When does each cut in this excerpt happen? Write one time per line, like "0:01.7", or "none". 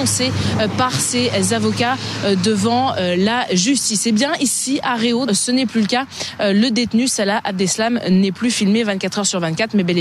0:05.3